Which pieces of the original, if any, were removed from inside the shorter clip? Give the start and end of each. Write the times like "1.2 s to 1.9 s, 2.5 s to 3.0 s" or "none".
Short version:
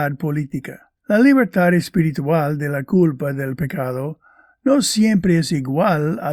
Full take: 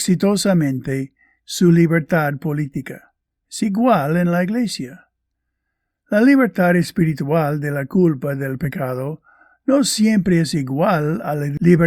3.2 s to 6.0 s